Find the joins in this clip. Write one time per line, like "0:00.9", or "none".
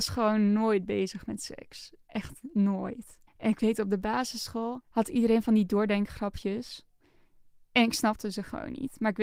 0:03.3